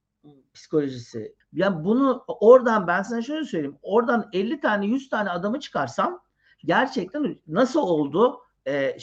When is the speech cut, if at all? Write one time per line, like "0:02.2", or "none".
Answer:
0:01.4